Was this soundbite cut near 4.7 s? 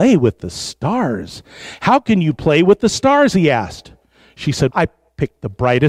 yes; 1 cut; at 4.7 s

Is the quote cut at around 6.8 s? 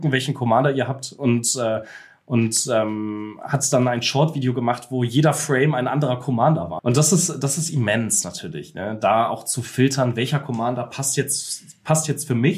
yes; 1 cut; at 6.8 s

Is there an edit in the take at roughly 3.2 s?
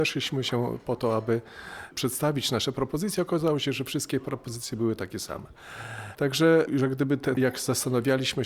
no; 2 cuts; at 6.1 s, 7.4 s

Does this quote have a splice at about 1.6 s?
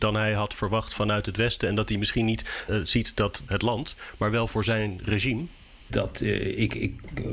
no; 2 cuts; at 3.5 s, 5.9 s

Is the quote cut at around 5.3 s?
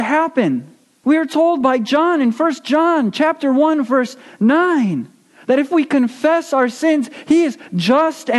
no; 1 cut; at 1.0 s

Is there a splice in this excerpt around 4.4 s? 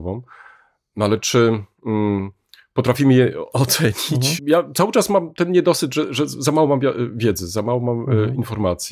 yes; 1 cut; at 4.4 s

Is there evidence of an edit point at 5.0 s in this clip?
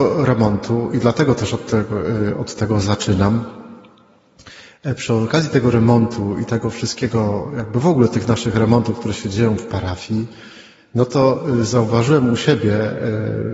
no; 0 cuts

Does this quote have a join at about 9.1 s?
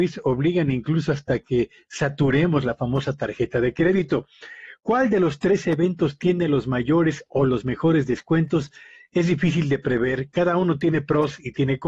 no; 0 cuts

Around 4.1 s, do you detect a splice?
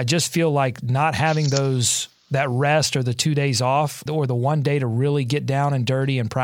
yes; 1 cut; at 4.1 s

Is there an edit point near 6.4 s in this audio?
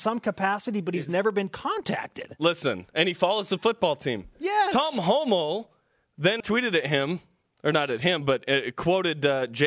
yes; 1 cut; at 6.4 s

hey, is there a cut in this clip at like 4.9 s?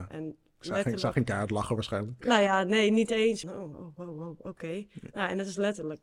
no; 1 cut; at 3.4 s

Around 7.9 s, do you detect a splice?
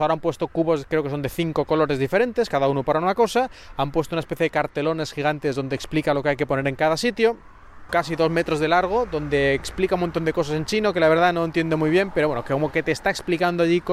yes; 1 cut; at 7.9 s

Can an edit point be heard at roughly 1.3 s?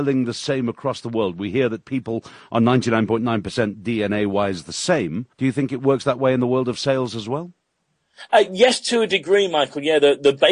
no; 1 cut; at 5.3 s

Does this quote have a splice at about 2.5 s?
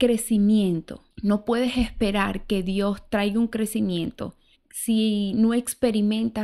no; 2 cuts; at 1.1 s, 4.5 s

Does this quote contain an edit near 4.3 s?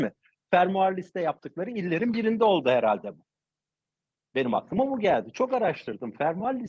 no; 0 cuts

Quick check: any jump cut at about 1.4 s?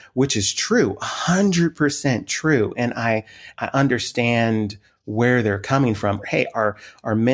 no; 2 cuts; at 3.5 s, 6.2 s

